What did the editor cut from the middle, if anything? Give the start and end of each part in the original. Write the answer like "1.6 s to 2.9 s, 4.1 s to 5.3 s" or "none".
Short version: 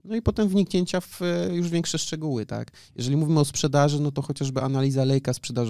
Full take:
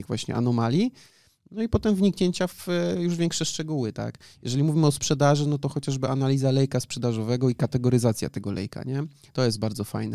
none

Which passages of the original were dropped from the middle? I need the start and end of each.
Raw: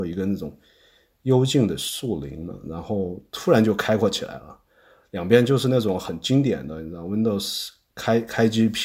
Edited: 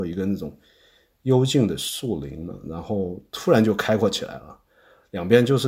none

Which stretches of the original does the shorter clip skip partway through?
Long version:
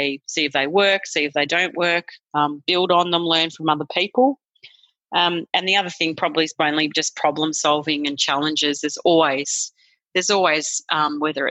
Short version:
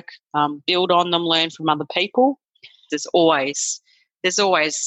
4.9 s to 8.8 s

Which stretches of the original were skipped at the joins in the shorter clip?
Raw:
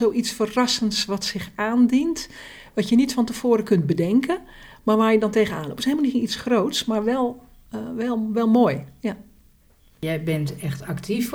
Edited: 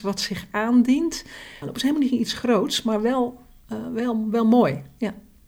2.7 s to 5.6 s

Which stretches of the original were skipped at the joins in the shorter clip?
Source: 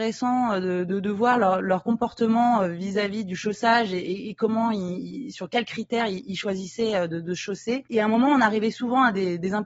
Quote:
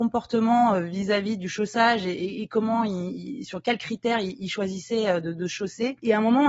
none

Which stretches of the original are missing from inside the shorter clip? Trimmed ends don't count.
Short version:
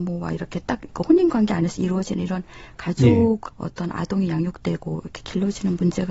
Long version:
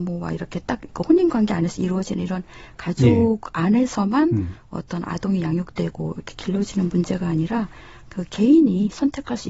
3.5 s to 4.6 s

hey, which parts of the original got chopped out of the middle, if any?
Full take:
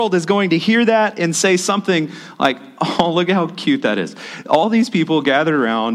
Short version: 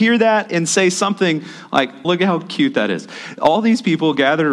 2.7 s to 3.1 s

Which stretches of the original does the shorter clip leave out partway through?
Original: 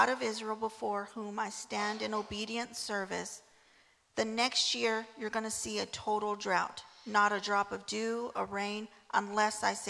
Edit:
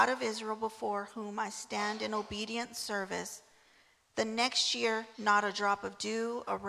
5.1 s to 7.0 s

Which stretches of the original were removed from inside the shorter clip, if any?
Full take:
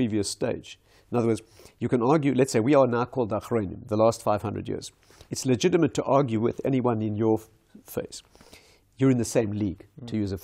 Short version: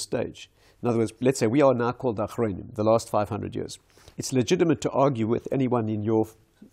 1.5 s to 2.3 s

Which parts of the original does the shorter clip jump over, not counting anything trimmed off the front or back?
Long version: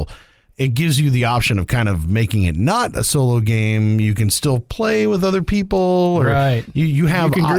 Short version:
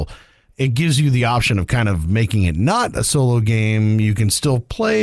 none

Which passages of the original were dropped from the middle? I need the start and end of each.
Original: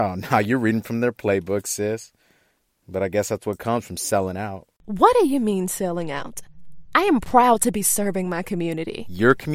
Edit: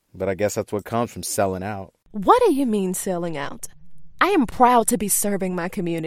none

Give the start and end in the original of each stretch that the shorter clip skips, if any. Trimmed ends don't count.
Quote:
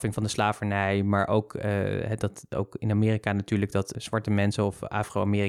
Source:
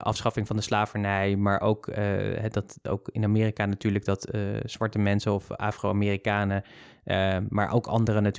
4.3 s to 4.6 s

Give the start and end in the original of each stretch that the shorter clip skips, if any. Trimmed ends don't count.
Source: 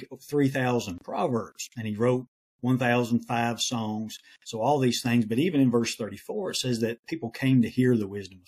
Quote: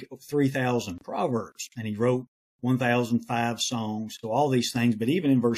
4.2 s to 4.5 s

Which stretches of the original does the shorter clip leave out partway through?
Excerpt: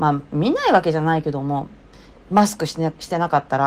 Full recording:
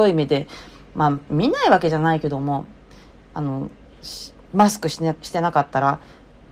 3.1 s to 4.4 s

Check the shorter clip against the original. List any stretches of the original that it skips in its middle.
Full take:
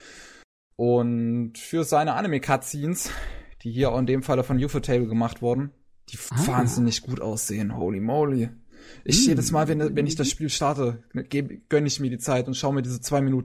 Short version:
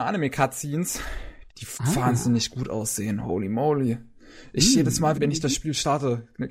3.6 s to 6.0 s, 9.7 s to 9.9 s

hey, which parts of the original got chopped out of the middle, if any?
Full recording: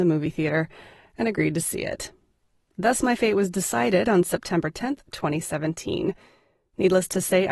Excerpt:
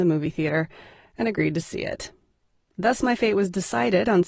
none

